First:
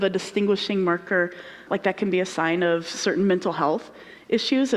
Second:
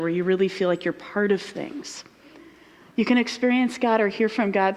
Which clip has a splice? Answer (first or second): first